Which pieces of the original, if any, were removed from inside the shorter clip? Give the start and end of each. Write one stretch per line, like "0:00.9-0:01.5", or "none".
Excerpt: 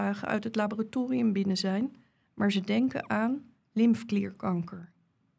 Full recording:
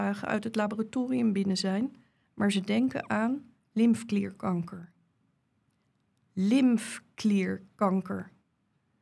none